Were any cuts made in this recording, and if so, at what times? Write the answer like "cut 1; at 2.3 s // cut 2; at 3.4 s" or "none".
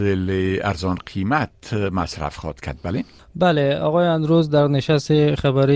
none